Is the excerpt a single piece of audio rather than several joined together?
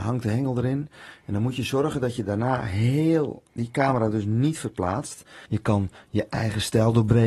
no; 2 cuts; at 3.5 s, 5.5 s

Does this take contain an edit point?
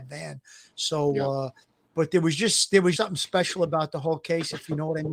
yes; 1 cut; at 3.0 s

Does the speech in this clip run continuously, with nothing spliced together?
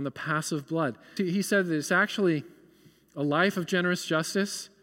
no; 1 cut; at 1.2 s

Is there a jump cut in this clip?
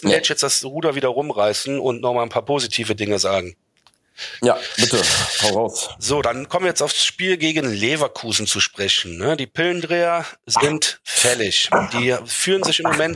no; 0 cuts

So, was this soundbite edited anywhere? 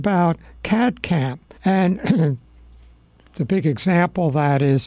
yes; 2 cuts; at 1.6 s, 3.3 s

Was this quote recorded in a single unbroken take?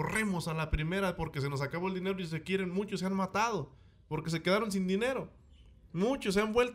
yes; 0 cuts

